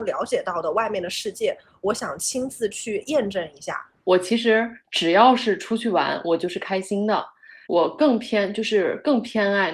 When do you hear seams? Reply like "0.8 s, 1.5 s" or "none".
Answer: 7.7 s